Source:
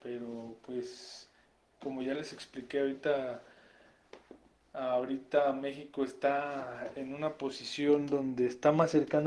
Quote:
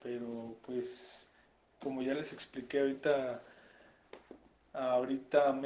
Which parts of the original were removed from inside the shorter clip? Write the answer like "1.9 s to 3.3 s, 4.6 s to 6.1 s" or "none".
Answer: none